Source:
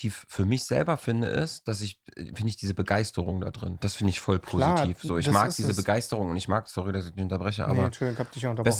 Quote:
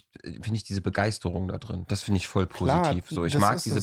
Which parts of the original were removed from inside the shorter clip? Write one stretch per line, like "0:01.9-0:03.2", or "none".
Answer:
none